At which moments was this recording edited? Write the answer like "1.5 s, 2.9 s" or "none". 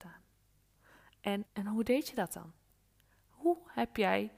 1.5 s